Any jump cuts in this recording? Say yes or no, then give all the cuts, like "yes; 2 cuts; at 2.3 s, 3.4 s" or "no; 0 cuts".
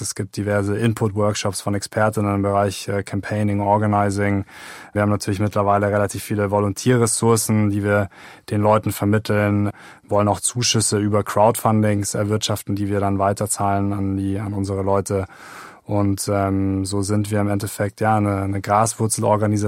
no; 0 cuts